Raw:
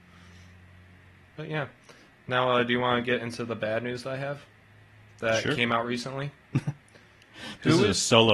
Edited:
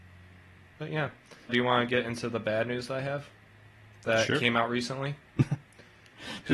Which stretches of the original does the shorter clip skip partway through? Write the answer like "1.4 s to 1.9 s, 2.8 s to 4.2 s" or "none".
2.1 s to 2.6 s